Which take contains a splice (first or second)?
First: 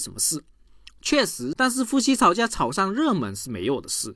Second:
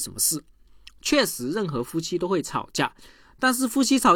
first